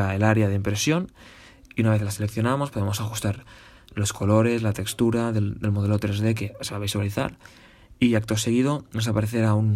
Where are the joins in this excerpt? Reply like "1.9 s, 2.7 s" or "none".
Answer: none

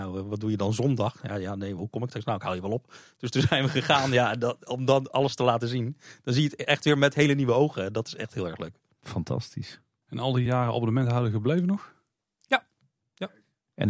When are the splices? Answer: 10.5 s

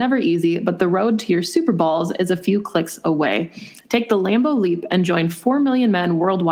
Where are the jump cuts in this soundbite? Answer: none

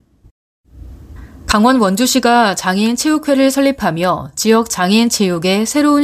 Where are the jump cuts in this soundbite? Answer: none

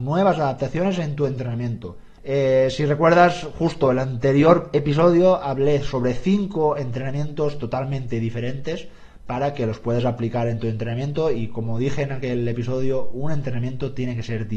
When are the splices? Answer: 2.2 s

